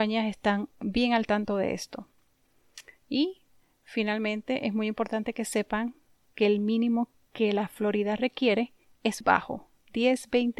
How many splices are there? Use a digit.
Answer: 1